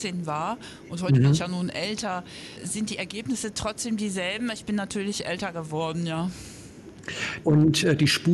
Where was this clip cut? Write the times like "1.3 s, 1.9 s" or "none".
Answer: 7.4 s